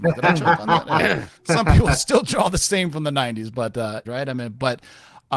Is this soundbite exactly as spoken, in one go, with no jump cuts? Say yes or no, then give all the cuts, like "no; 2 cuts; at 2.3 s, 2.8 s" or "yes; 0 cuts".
no; 2 cuts; at 1.4 s, 4.0 s